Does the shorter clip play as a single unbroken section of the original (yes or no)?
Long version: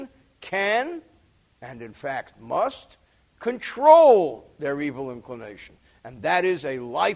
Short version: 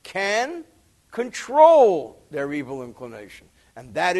no